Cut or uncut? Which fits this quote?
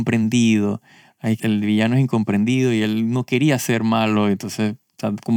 cut